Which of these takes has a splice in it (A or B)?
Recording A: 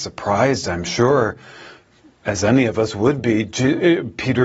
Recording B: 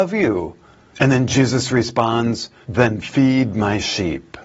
B